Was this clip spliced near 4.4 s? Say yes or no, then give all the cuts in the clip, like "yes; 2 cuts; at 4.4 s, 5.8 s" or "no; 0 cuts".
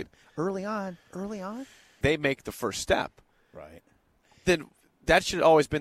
no; 1 cut; at 2.0 s